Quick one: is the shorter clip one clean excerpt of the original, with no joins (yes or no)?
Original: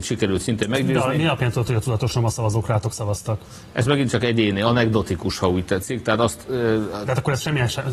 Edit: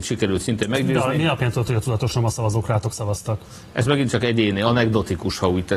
yes